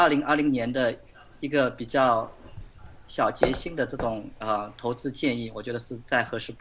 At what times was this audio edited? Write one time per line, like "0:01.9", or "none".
none